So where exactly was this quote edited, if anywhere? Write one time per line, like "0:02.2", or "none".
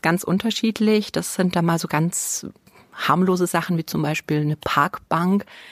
none